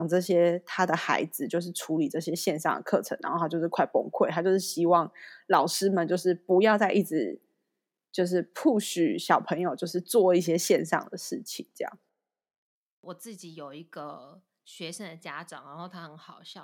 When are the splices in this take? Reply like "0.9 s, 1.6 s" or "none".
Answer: none